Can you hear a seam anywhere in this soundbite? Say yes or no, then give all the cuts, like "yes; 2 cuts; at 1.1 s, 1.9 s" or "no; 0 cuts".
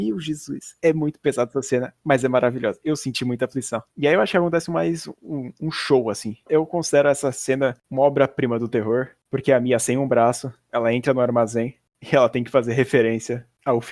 yes; 2 cuts; at 6.5 s, 9.2 s